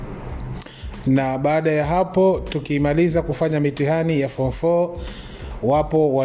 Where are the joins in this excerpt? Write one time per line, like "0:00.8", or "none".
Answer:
0:01.0